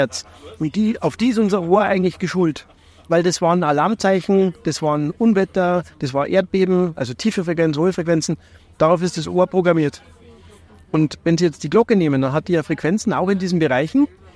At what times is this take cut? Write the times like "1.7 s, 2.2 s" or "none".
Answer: 8.7 s